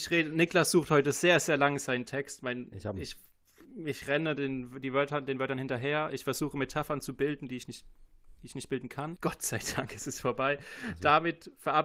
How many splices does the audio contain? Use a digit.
1